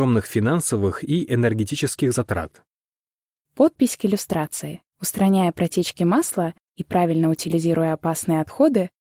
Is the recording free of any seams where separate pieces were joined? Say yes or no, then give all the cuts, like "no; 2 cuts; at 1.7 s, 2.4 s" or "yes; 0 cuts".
no; 2 cuts; at 3.4 s, 4.9 s